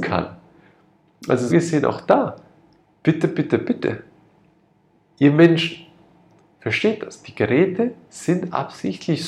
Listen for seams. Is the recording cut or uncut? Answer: cut